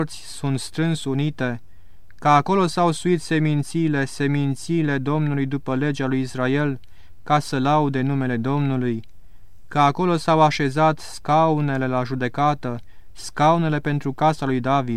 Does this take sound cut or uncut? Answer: uncut